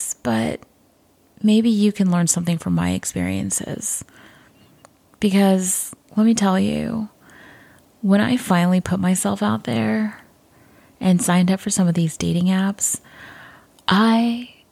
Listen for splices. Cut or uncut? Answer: uncut